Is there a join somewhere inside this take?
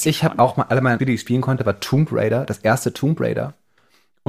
yes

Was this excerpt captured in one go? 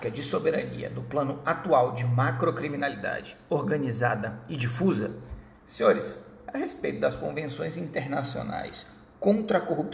no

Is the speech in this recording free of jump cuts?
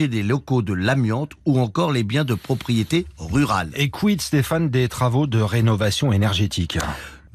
yes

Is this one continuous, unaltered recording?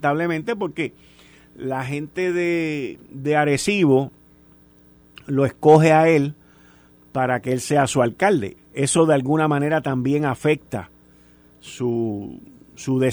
no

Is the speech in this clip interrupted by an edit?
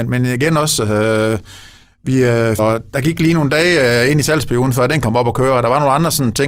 yes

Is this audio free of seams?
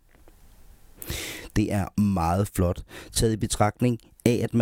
yes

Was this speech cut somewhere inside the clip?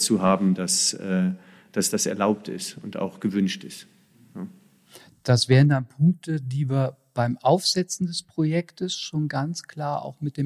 no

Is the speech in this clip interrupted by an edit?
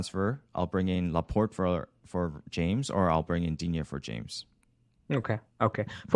no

